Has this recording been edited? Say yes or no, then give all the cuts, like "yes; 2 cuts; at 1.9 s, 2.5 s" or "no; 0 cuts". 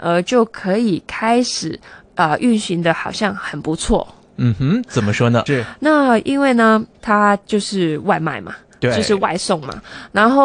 yes; 2 cuts; at 5.5 s, 6.9 s